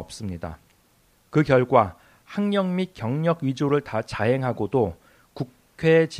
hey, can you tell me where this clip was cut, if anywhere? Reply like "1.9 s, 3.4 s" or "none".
1.1 s